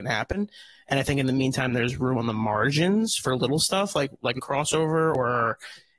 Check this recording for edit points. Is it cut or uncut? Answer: uncut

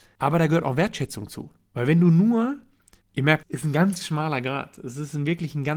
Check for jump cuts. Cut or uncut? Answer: cut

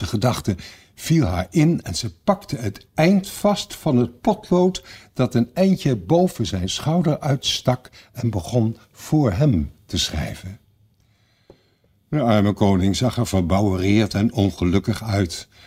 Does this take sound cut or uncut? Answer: uncut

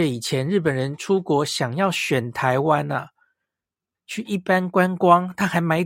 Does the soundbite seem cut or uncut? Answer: uncut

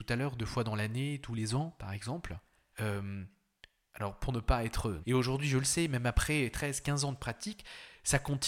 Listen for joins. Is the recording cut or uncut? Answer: cut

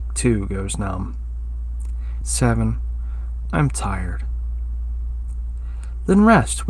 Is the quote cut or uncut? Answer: cut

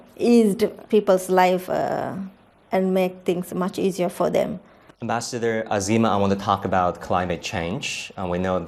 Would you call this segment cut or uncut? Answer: uncut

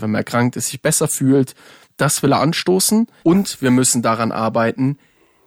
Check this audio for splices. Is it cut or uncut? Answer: cut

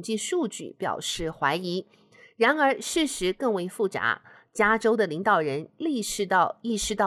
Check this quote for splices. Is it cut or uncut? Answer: uncut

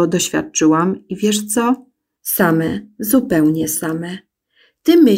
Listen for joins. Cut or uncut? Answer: cut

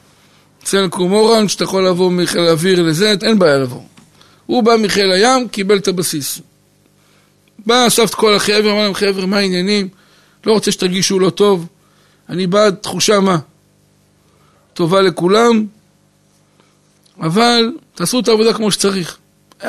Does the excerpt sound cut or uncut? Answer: cut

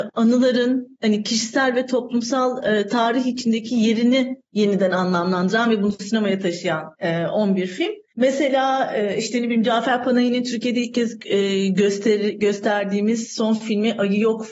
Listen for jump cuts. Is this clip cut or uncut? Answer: uncut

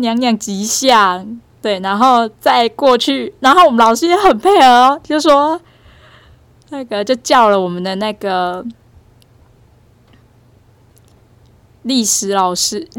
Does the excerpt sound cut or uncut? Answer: cut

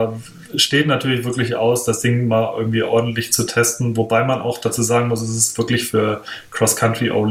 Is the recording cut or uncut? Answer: uncut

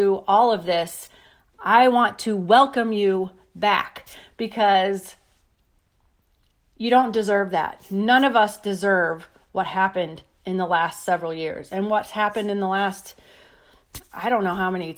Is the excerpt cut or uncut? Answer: uncut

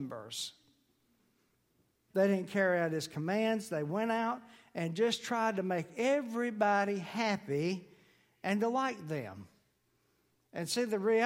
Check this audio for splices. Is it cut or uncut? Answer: cut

